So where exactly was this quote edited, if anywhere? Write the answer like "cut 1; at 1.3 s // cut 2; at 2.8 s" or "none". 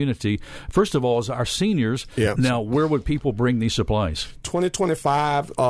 cut 1; at 2.3 s